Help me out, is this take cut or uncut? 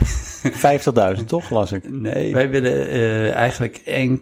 cut